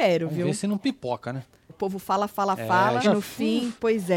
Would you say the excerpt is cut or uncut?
cut